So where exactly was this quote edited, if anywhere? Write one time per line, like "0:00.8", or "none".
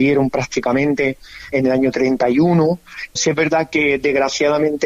0:01.5
0:03.2